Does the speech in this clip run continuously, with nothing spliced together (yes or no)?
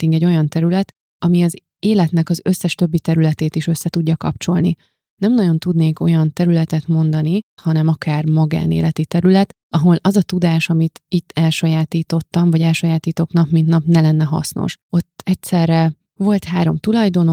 no